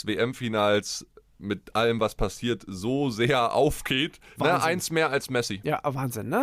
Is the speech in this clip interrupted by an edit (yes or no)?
yes